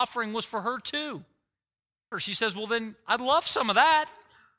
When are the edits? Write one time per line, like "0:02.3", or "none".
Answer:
0:02.1